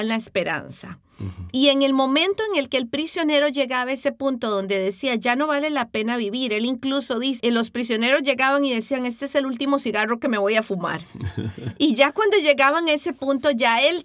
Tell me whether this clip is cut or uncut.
cut